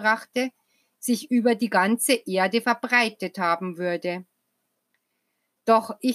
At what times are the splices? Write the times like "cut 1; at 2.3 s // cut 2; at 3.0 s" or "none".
none